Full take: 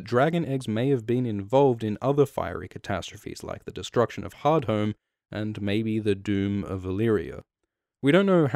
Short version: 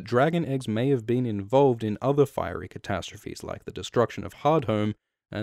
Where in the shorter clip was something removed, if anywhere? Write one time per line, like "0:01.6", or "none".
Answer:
none